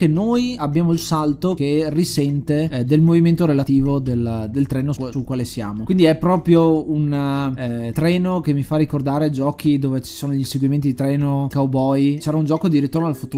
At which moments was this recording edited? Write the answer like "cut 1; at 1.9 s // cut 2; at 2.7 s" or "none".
cut 1; at 4.5 s // cut 2; at 11.5 s

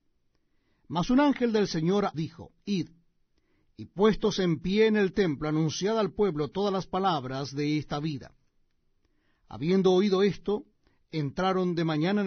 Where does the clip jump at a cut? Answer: cut 1; at 2.1 s

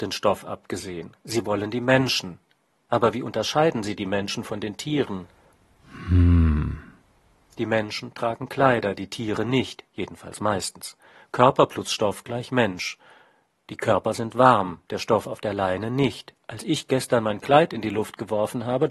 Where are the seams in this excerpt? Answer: none

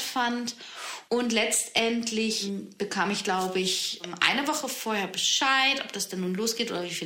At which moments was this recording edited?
cut 1; at 1.1 s

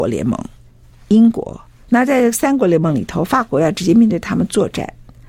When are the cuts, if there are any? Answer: cut 1; at 1.9 s

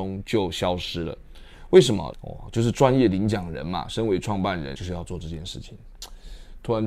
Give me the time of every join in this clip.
cut 1; at 2.1 s // cut 2; at 4.8 s

